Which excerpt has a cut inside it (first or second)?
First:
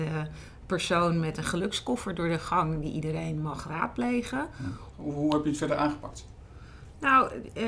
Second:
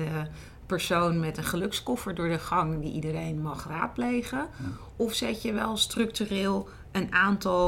first